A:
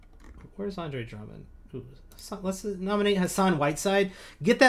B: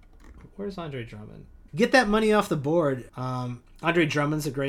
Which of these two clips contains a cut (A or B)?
B